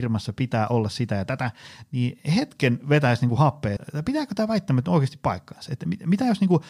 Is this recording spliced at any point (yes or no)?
yes